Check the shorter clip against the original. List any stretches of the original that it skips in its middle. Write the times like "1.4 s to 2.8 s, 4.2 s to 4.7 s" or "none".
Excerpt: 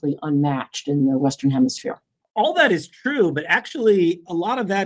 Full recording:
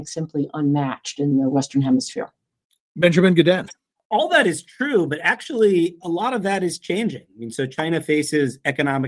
2.5 s to 3.9 s